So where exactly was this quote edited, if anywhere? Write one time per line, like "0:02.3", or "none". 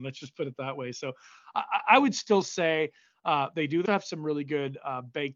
0:03.9